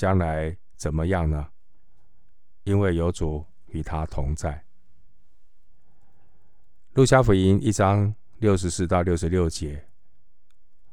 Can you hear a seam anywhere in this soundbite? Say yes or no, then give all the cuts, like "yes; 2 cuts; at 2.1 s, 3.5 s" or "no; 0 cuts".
no; 0 cuts